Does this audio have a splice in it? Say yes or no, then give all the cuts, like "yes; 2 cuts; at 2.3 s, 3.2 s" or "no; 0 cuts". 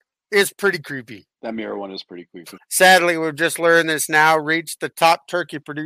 yes; 2 cuts; at 1.3 s, 2.6 s